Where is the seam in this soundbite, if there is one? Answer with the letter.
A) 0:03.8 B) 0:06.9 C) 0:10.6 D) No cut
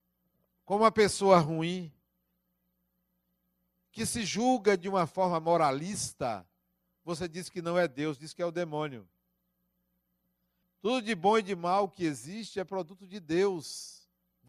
C